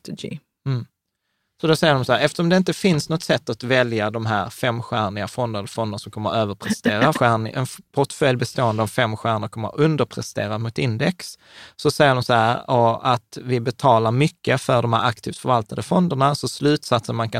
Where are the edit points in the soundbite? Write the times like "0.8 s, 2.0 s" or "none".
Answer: 7.1 s